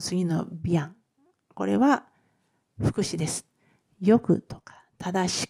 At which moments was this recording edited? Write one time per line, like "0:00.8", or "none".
none